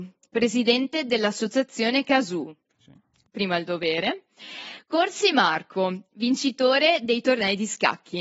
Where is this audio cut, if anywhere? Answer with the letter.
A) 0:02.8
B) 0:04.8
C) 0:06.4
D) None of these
A